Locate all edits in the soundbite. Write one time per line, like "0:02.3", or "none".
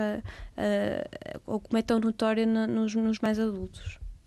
none